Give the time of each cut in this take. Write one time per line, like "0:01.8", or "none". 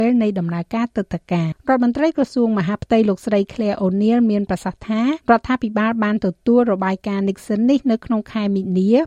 0:01.5
0:05.2